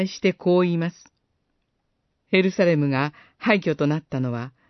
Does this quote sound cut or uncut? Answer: cut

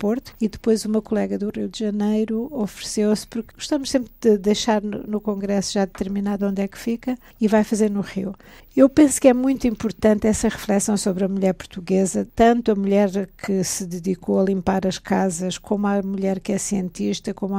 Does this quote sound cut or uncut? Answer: uncut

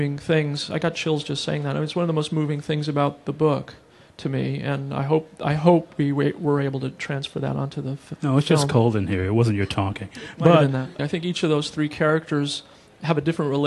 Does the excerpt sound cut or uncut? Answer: cut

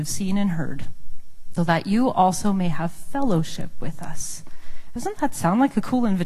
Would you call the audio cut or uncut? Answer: cut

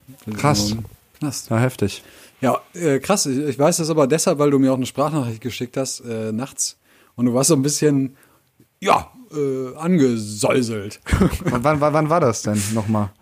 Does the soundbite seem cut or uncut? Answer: uncut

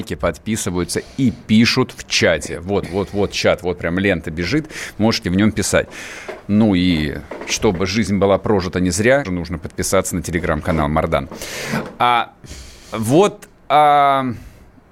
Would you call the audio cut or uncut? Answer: cut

